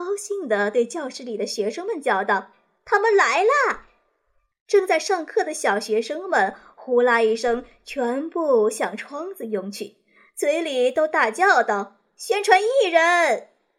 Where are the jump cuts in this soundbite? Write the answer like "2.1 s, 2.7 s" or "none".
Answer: none